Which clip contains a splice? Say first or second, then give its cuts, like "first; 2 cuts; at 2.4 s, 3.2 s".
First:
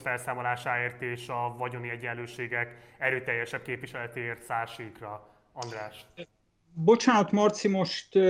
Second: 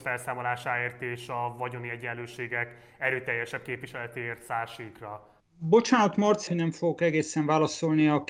second; 2 cuts; at 5.4 s, 6.5 s